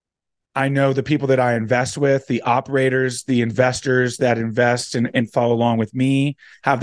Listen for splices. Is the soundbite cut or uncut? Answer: uncut